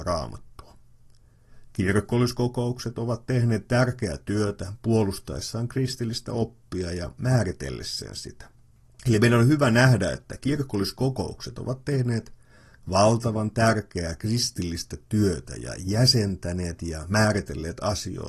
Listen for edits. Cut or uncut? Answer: uncut